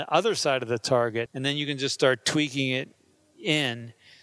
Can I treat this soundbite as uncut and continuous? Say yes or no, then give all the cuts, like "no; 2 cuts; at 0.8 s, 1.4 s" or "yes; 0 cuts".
no; 1 cut; at 1.3 s